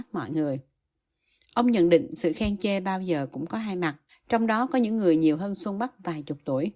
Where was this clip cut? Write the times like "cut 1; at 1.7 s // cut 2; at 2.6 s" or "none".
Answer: cut 1; at 4.1 s